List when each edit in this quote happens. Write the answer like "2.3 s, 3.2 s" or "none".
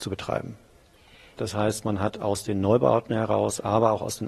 1.4 s

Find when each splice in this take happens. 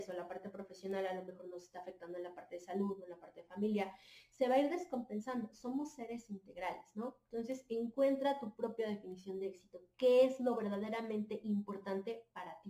none

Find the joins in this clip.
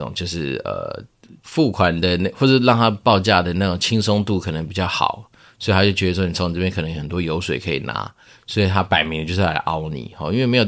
1.4 s

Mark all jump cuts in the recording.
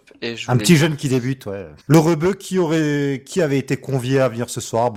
1.8 s

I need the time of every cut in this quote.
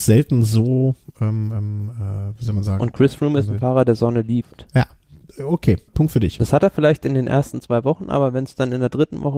5.9 s

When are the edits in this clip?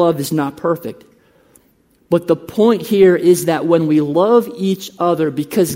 none

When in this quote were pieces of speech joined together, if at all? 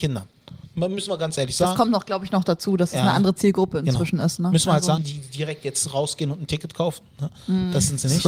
5.0 s

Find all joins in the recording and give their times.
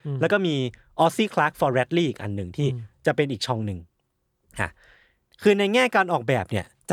none

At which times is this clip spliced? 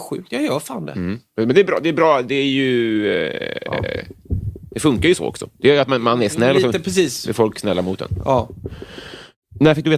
none

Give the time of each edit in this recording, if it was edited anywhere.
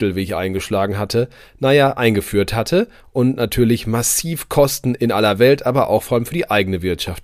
none

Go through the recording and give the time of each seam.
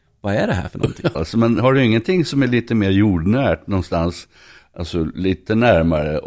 1.1 s

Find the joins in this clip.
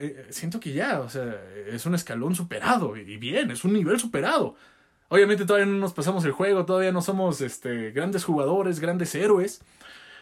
none

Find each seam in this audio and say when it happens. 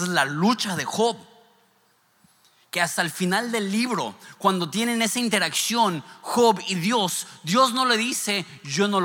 none

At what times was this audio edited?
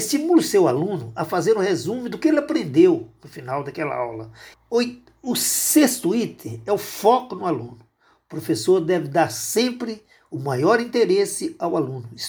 4.5 s

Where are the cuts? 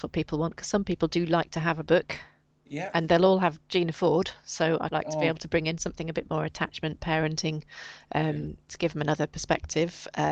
4.9 s

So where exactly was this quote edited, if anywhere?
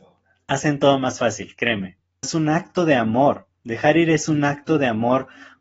2.2 s

